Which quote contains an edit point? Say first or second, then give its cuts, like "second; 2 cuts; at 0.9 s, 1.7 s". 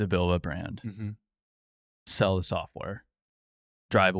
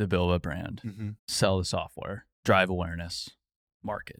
second; 2 cuts; at 1.2 s, 2.3 s